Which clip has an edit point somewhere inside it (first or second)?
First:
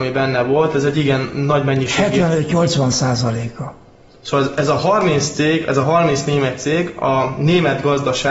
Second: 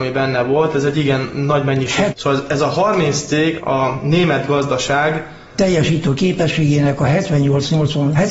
second